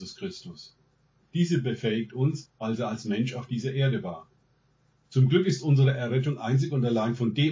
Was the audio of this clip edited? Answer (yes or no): yes